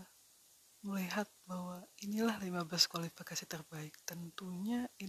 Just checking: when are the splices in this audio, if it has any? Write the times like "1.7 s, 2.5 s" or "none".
none